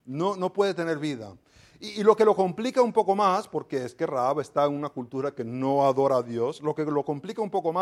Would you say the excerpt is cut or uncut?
uncut